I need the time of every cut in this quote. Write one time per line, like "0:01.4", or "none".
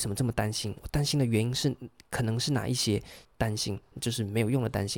0:03.2